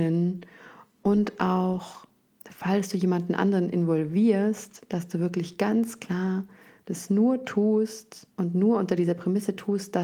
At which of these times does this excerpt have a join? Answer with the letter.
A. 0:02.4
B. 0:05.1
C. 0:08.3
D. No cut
C